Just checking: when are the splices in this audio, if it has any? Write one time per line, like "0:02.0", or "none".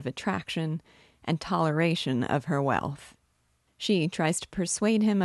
0:01.1
0:03.7

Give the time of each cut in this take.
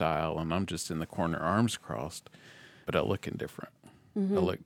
0:02.8

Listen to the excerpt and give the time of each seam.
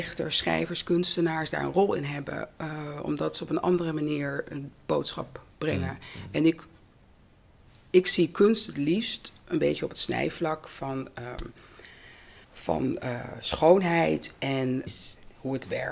0:12.4
0:14.9

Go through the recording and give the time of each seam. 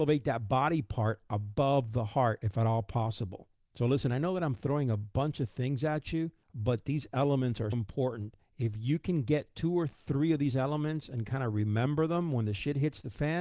0:06.4
0:07.7

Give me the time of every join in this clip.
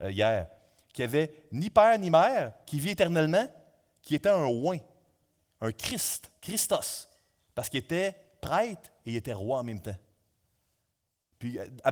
none

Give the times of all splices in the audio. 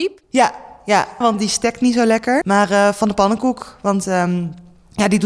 0:01.2
0:02.4

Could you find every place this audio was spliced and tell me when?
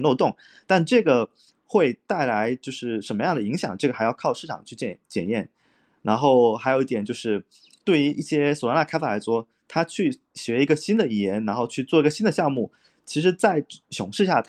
none

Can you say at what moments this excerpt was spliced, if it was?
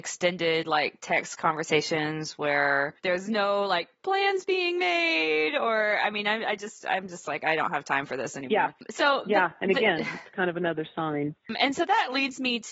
0:03.0

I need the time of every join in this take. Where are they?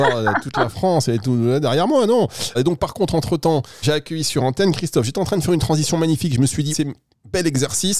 0:02.5
0:03.8
0:06.7

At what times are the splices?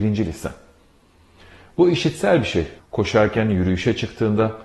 0:02.8

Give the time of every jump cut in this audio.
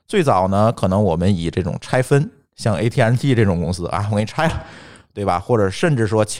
none

